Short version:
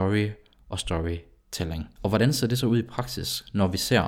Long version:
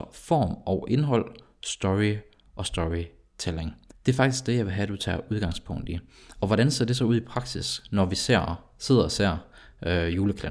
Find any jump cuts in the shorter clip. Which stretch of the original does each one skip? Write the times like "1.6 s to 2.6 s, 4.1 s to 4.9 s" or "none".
3.8 s to 6.3 s